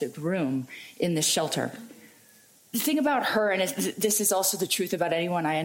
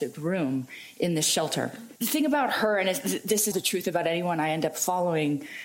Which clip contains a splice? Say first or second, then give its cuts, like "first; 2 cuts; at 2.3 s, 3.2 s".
second; 2 cuts; at 2.0 s, 3.5 s